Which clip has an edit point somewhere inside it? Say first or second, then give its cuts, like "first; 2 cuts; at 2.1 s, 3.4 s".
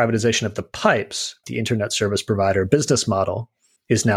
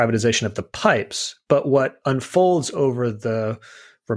first; 1 cut; at 1.4 s